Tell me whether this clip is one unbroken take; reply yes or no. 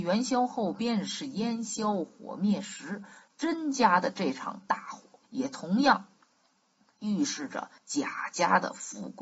no